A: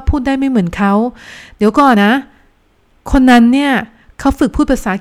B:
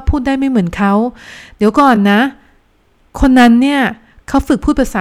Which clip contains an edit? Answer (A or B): A